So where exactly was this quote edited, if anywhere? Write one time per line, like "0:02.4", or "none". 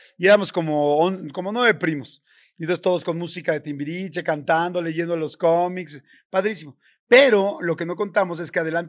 none